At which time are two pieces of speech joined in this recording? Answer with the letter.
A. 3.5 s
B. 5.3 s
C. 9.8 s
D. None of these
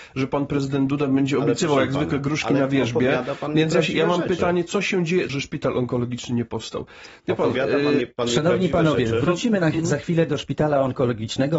B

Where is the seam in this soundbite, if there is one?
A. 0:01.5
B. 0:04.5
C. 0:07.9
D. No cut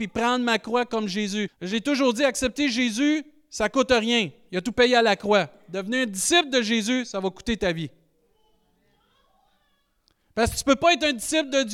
A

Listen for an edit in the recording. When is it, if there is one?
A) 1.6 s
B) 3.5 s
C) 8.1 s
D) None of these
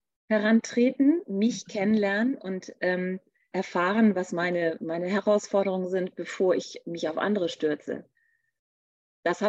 B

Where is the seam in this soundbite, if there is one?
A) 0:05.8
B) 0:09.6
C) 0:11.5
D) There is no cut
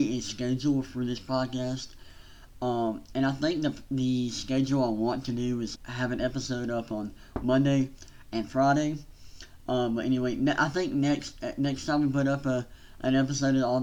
A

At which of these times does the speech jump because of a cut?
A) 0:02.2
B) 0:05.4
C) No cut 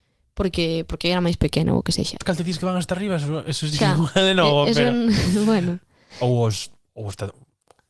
A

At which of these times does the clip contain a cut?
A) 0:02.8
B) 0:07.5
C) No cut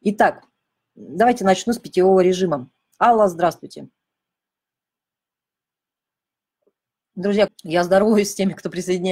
B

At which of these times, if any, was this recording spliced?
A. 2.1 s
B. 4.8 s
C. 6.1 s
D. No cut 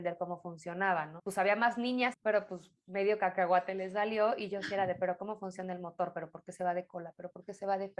A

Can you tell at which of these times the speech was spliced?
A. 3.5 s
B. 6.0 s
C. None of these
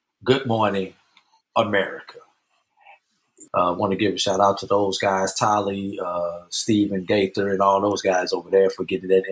A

